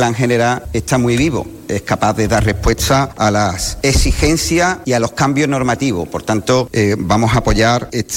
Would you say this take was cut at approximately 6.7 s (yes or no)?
no